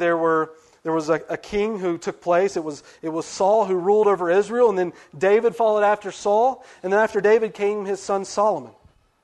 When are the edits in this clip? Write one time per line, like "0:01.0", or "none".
none